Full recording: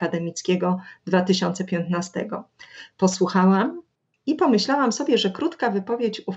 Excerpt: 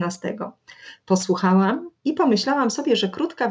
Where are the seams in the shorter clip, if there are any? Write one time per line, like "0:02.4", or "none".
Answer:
0:02.0